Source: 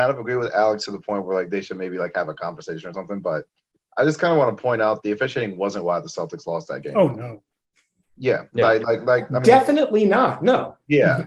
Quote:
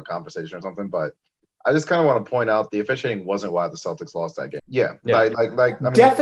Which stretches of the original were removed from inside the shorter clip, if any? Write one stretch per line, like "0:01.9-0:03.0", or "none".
0:06.9-0:08.1